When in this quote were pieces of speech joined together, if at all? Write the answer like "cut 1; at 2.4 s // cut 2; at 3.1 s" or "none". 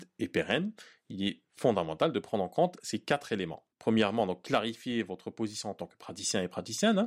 cut 1; at 3.7 s